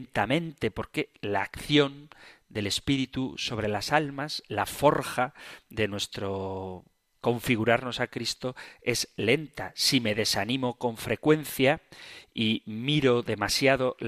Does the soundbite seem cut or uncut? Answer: uncut